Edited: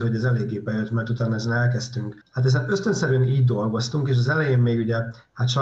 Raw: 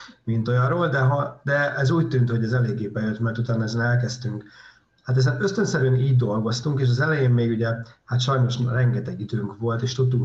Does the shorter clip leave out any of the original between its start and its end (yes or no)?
yes